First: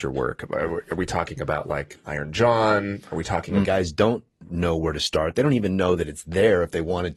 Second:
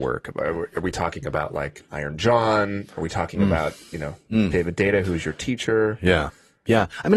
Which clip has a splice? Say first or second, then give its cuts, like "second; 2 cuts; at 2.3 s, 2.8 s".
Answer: first; 1 cut; at 3.6 s